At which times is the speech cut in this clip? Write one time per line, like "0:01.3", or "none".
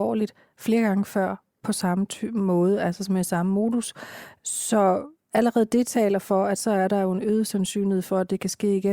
none

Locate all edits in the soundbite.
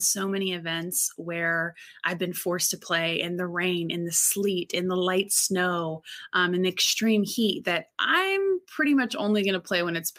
none

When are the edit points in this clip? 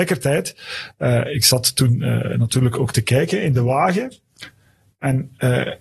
none

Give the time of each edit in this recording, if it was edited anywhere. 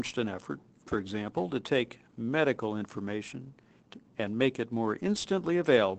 none

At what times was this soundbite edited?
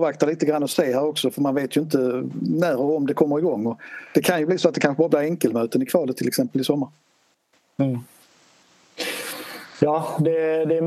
none

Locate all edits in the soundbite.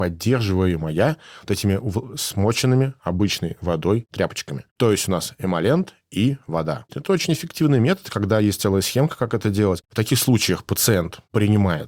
0:06.9
0:09.8

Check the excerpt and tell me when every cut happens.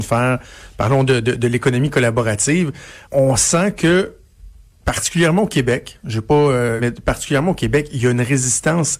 0:03.0
0:06.8

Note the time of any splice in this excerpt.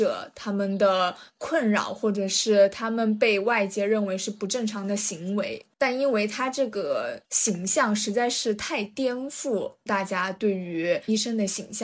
0:05.7
0:07.2

